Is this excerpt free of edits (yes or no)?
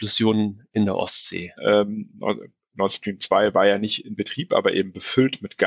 no